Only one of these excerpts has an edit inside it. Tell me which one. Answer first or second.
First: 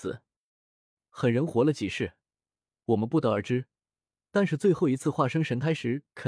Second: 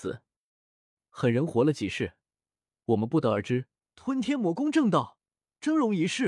second